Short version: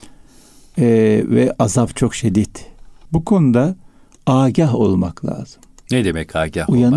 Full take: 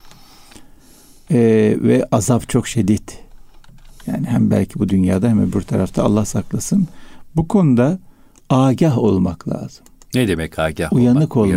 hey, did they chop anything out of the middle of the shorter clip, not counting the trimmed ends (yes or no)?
yes